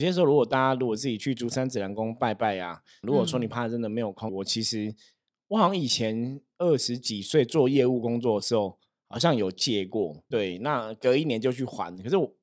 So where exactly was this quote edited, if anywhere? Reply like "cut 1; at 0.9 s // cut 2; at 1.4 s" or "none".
cut 1; at 3.0 s // cut 2; at 4.3 s // cut 3; at 10.3 s